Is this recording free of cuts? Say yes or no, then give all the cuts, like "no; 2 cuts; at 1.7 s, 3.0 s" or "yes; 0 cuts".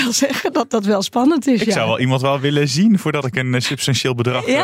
yes; 0 cuts